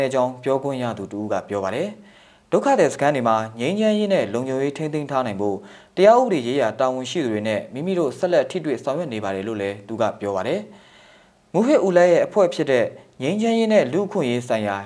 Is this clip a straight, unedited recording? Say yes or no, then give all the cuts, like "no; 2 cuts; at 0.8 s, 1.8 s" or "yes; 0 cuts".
yes; 0 cuts